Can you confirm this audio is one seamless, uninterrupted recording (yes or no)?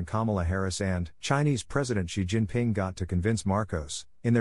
no